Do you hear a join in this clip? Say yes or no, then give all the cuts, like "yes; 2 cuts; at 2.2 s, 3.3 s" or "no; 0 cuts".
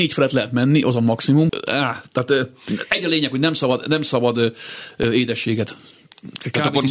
yes; 1 cut; at 1.5 s